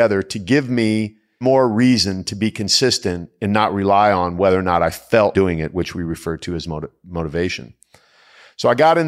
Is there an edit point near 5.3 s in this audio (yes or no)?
yes